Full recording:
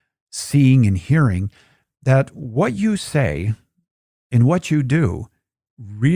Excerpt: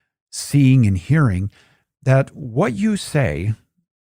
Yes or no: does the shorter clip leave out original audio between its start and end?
no